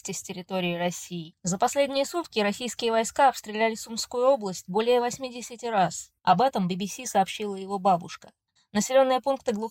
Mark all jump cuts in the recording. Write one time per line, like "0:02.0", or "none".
0:06.2
0:08.6